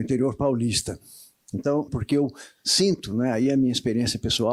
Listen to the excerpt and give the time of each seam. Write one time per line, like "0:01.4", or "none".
0:01.9